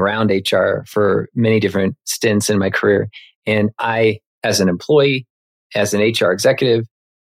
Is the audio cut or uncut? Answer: cut